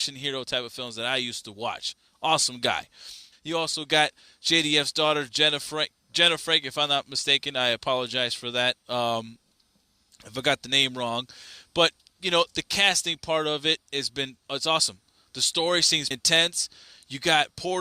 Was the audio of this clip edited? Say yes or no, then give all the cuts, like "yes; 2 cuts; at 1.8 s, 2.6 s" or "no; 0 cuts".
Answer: yes; 3 cuts; at 3.3 s, 14.4 s, 16.1 s